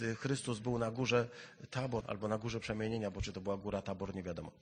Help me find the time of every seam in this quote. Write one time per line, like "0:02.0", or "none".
0:02.0

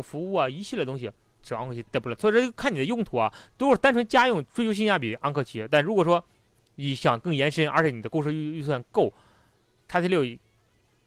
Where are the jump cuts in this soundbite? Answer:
0:01.9

